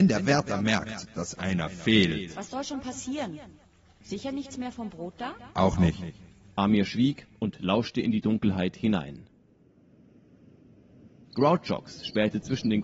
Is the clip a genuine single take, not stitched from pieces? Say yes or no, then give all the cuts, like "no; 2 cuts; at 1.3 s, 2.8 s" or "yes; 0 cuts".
no; 1 cut; at 5.5 s